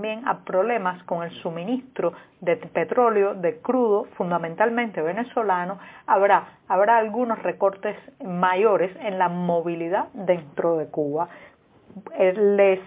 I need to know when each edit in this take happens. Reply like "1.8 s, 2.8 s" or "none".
none